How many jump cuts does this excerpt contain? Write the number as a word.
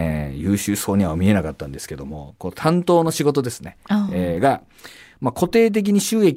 zero